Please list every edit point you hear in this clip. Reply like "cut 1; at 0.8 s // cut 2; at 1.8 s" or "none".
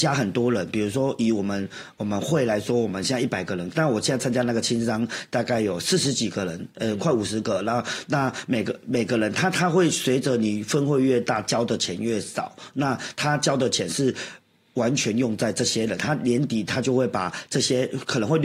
none